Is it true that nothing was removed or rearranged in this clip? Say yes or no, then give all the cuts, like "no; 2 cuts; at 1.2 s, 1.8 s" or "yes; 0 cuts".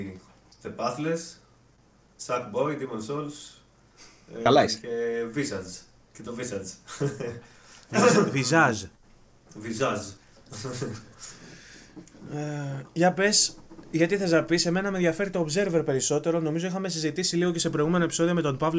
no; 1 cut; at 2.2 s